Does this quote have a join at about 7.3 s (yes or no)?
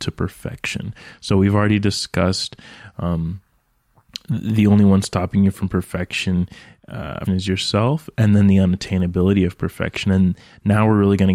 yes